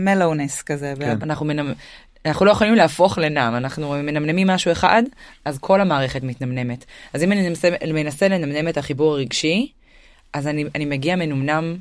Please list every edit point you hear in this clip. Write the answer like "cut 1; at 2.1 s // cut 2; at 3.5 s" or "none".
cut 1; at 1.2 s